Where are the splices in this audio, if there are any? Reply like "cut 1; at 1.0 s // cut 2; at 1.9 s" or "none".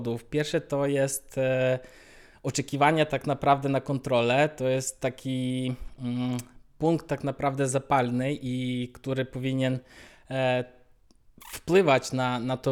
none